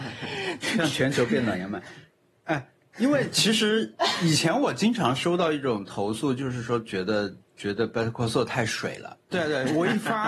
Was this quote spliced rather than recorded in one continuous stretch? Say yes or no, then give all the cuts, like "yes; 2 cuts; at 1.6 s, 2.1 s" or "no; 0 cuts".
yes; 2 cuts; at 7.5 s, 9.2 s